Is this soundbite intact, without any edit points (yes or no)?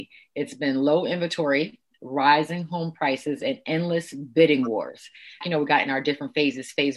no